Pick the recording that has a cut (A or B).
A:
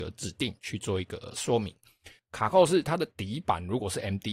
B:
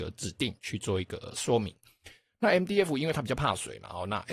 A